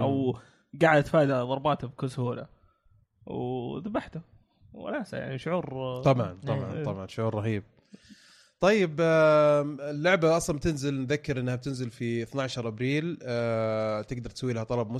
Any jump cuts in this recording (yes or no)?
no